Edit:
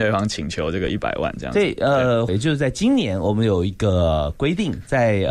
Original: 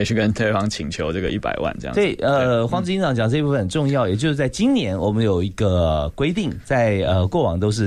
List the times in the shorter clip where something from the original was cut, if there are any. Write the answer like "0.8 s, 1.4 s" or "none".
2.3 s